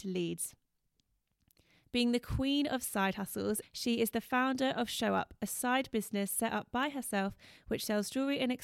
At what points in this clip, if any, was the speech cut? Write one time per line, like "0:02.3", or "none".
0:03.6